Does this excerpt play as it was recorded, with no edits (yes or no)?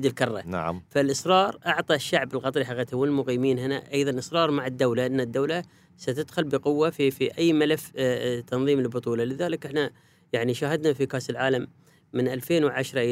yes